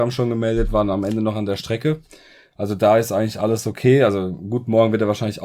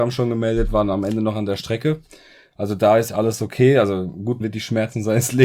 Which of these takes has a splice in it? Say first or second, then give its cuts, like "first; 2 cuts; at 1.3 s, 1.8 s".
second; 2 cuts; at 3.1 s, 4.4 s